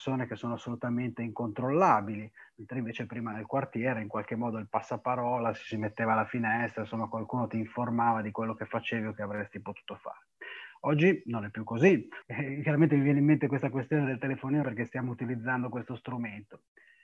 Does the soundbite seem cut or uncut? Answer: cut